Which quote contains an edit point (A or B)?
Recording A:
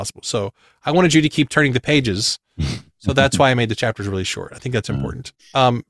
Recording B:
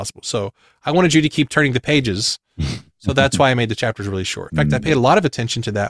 B